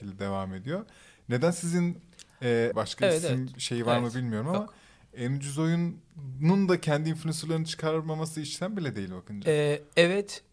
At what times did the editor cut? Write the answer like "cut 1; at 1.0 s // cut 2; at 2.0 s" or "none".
cut 1; at 2.7 s